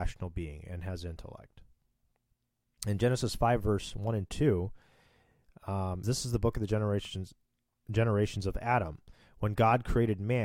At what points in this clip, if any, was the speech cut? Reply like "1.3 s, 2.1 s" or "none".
6.0 s